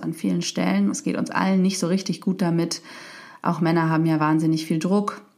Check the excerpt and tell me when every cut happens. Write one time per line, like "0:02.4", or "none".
0:00.9